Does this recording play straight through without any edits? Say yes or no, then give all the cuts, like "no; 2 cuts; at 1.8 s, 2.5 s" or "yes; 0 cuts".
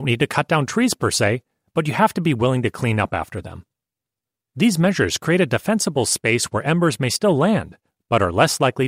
yes; 0 cuts